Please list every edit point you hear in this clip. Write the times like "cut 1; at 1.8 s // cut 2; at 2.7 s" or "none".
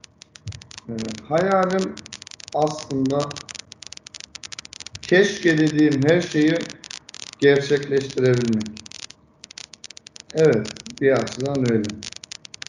cut 1; at 10.3 s